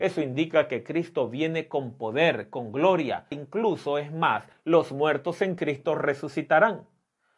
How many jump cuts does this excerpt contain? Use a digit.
2